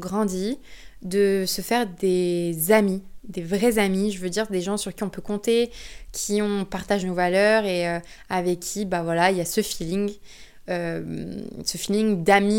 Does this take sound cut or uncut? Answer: uncut